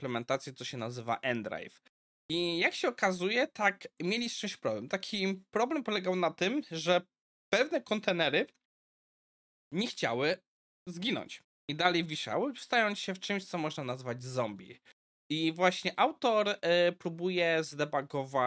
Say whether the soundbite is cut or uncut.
cut